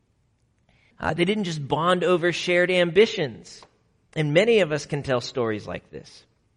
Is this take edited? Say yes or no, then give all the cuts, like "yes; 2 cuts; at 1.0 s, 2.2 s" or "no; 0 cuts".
yes; 2 cuts; at 0.9 s, 4.1 s